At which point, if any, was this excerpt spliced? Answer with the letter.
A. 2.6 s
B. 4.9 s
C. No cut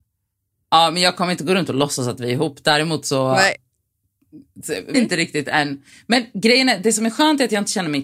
B